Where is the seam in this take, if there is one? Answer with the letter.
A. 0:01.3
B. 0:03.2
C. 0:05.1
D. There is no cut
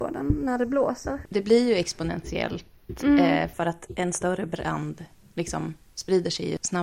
A